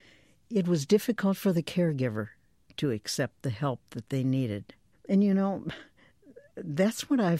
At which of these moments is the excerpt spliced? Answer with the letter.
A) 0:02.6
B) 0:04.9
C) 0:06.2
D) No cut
B